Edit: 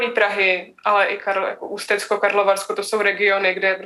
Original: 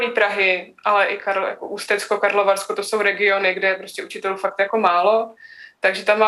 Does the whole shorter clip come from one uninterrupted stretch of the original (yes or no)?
yes